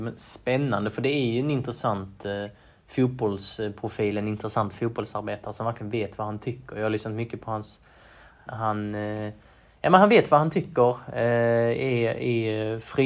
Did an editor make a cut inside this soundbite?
yes; 1 cut; at 8.5 s

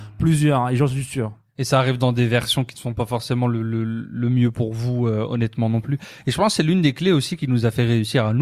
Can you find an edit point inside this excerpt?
no; 0 cuts

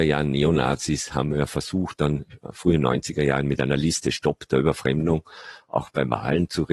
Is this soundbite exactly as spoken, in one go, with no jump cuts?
yes; 0 cuts

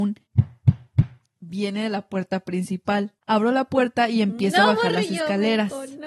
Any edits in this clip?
yes; 1 cut; at 3.2 s

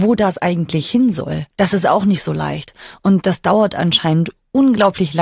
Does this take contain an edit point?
no; 0 cuts

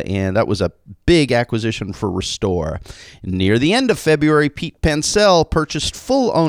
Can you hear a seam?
no; 0 cuts

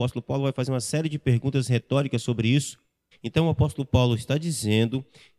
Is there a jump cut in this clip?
yes; 1 cut; at 3.1 s

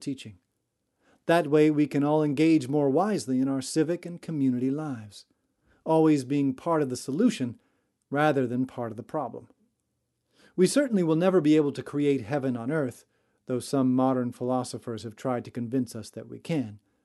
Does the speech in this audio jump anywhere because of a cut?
no; 0 cuts

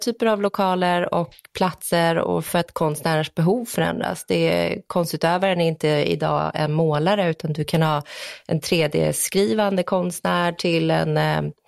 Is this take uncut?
yes; 0 cuts

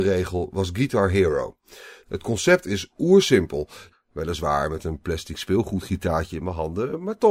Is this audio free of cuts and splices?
no; 2 cuts; at 2.0 s, 3.9 s

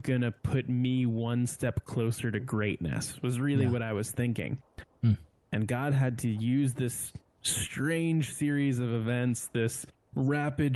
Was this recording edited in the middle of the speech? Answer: no; 0 cuts

